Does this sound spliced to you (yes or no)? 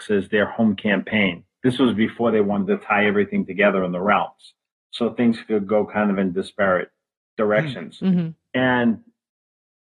no